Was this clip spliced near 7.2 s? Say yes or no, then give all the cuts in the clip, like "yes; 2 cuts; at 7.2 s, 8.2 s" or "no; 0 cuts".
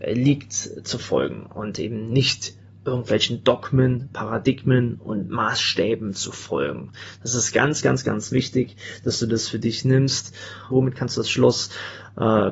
no; 1 cut; at 10.7 s